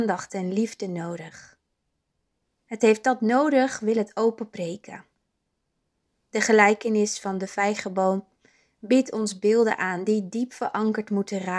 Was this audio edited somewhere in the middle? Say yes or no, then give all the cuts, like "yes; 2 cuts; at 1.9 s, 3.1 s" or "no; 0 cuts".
no; 0 cuts